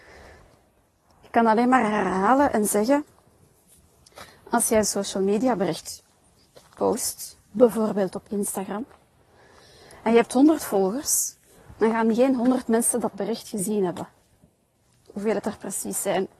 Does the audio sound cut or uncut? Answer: uncut